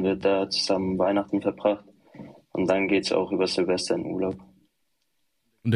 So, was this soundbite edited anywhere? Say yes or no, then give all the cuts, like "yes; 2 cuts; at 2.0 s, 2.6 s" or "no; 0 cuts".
no; 0 cuts